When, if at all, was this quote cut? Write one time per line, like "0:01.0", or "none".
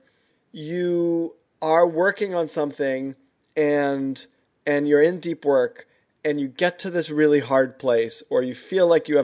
none